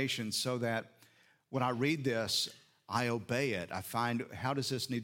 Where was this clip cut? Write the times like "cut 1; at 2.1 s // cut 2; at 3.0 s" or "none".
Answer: none